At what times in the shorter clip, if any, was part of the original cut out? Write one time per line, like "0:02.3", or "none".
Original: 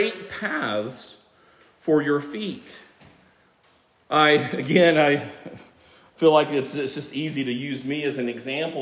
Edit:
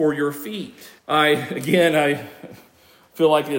0:01.0